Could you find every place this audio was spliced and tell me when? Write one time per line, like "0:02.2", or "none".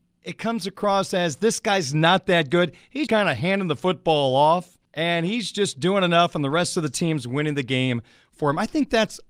0:03.1
0:04.9